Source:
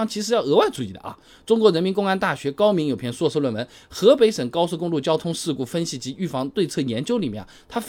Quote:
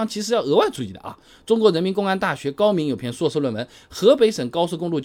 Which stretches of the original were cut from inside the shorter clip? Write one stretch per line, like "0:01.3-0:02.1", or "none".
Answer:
none